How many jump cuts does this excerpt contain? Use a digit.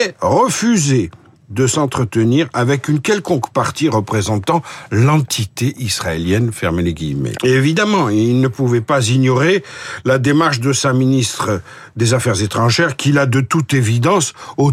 1